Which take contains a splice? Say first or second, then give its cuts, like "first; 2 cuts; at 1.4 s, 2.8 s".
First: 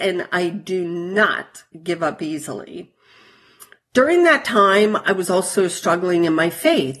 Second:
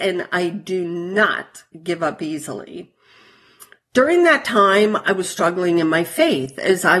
second; 1 cut; at 5.2 s